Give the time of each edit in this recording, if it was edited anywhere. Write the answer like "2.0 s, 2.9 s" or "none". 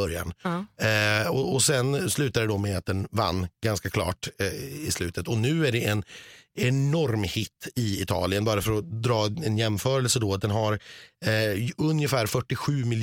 none